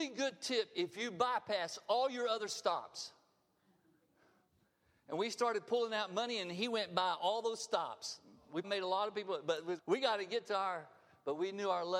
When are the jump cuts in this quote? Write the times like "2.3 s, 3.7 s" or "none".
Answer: 8.6 s, 9.8 s